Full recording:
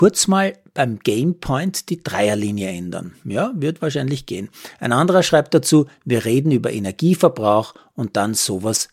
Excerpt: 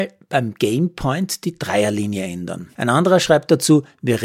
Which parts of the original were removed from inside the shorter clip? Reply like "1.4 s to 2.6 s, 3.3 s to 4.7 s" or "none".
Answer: 3.2 s to 4.8 s